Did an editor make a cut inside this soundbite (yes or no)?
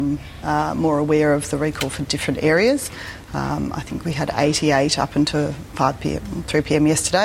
no